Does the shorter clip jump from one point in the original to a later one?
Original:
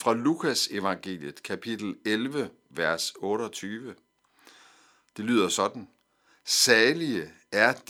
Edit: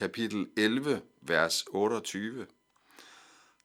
no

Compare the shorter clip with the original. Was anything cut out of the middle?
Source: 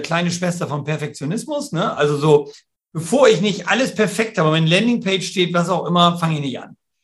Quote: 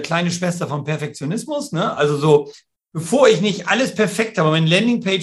no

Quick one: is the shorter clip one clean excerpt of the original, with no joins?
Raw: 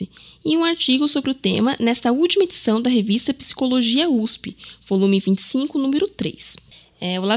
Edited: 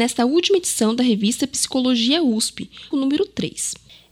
no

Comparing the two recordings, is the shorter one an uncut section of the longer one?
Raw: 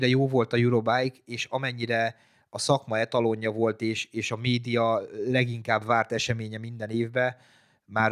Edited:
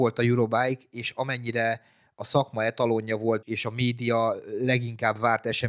no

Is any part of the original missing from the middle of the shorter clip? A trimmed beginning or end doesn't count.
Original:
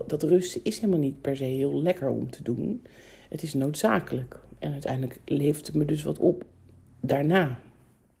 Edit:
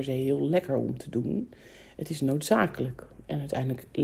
no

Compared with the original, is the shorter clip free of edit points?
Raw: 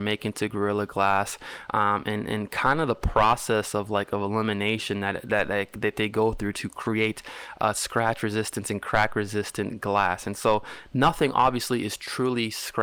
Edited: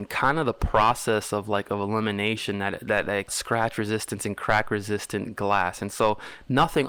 no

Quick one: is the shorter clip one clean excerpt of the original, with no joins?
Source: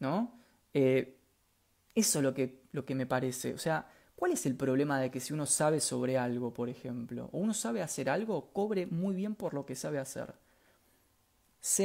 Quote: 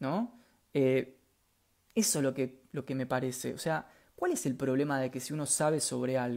yes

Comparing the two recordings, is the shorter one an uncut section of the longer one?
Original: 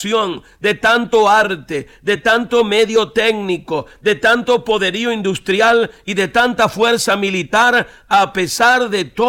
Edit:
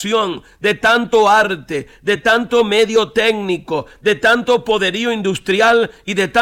yes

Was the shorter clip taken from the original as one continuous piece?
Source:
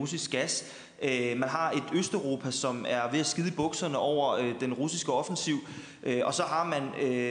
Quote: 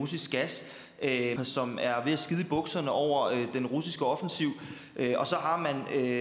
no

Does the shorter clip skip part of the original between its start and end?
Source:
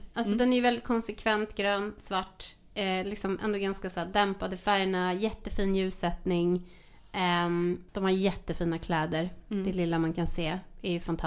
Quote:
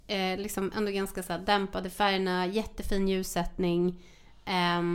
no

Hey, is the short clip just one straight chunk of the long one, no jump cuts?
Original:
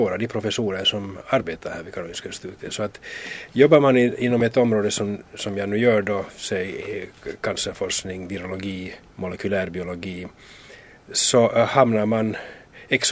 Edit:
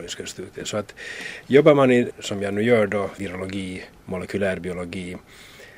no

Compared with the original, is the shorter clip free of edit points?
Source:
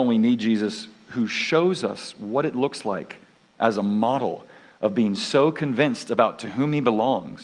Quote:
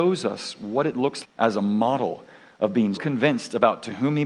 no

